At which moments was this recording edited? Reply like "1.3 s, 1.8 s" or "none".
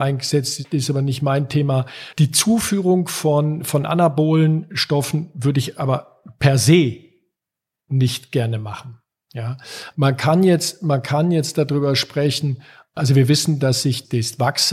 none